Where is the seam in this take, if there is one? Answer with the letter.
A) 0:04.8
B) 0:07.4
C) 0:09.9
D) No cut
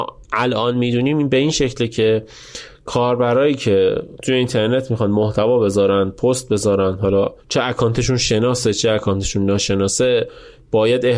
B